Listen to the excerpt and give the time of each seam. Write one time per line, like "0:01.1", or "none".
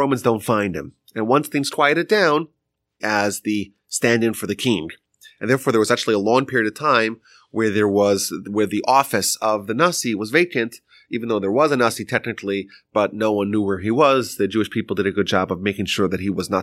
0:03.0